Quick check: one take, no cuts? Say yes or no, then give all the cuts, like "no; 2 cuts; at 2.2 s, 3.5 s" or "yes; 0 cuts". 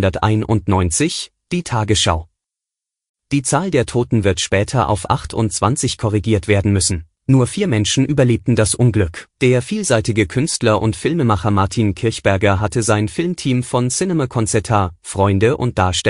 no; 2 cuts; at 7.2 s, 9.3 s